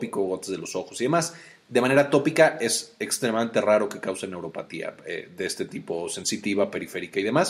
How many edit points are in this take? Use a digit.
0